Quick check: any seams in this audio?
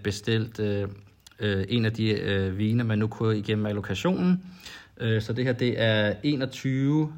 no; 0 cuts

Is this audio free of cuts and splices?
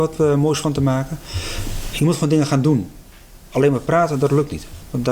yes; 0 cuts

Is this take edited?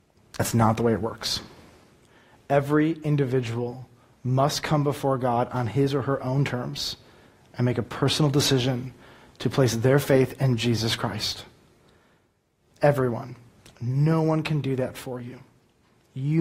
no; 0 cuts

